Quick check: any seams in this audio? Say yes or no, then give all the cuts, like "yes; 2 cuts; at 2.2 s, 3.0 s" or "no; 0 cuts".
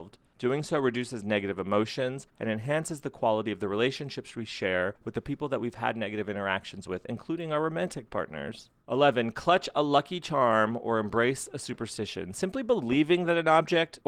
yes; 1 cut; at 2.3 s